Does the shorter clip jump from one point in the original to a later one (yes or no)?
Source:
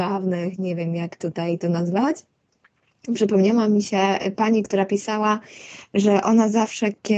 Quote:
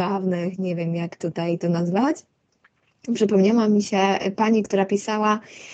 no